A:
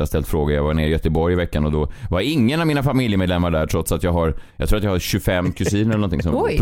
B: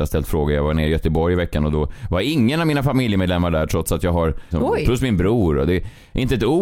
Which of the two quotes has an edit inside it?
B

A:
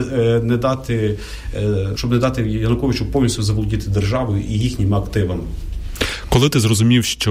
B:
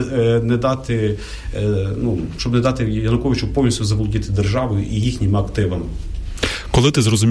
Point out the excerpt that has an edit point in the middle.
A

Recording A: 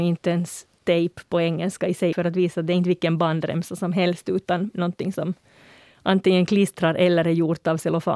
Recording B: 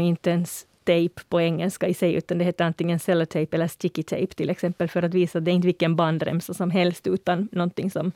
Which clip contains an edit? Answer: A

